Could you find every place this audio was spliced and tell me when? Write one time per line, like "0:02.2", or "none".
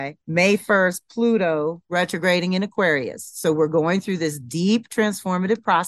none